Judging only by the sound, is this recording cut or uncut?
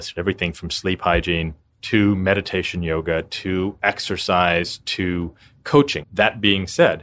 cut